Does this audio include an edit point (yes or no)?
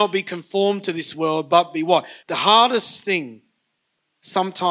yes